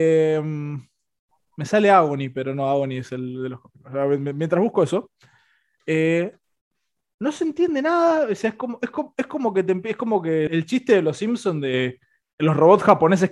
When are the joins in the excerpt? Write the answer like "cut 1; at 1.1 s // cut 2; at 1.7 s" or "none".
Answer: cut 1; at 10.5 s

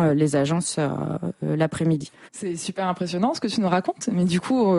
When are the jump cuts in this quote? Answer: cut 1; at 2.3 s

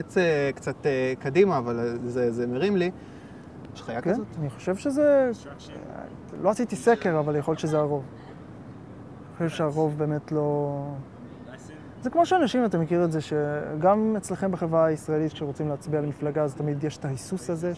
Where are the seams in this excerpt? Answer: cut 1; at 3.7 s

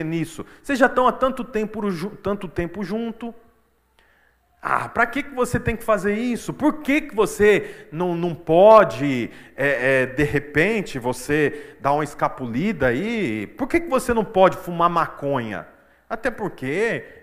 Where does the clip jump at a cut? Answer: none

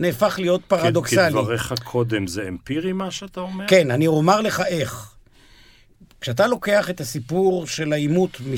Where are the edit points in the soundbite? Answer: none

